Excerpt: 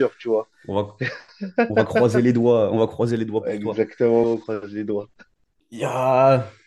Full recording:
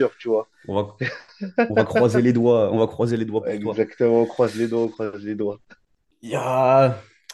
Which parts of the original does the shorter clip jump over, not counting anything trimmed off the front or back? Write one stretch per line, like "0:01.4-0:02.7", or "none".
0:04.2-0:04.7